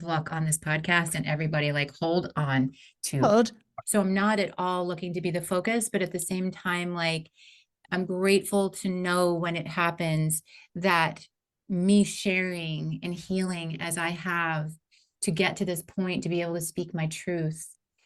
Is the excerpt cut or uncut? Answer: cut